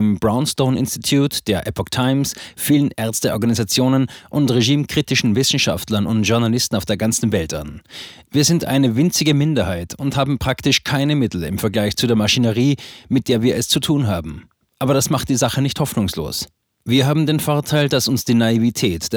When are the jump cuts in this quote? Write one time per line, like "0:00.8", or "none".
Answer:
none